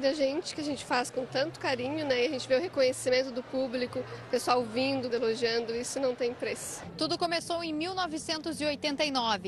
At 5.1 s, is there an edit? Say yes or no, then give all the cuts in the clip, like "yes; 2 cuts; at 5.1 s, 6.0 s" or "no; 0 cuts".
yes; 1 cut; at 5.1 s